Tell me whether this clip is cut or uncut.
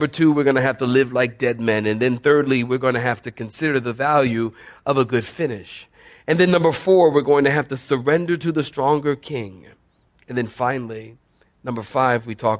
uncut